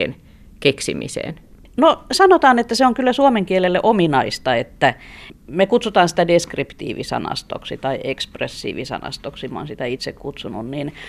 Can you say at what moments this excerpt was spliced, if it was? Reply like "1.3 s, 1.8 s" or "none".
none